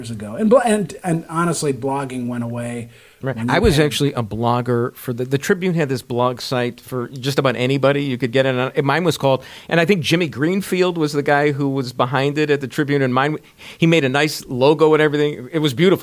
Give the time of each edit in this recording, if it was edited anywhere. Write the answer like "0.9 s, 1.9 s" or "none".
3.2 s